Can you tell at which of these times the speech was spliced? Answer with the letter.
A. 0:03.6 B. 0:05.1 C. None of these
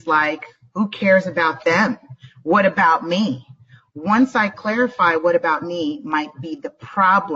C